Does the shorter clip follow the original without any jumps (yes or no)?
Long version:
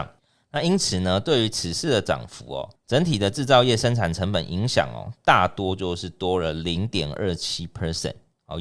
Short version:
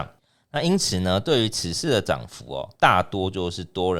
no